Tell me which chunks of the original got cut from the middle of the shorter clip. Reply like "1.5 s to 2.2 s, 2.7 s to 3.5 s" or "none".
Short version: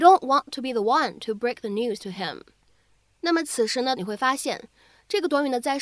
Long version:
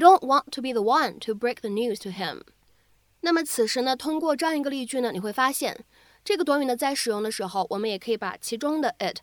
4.0 s to 5.1 s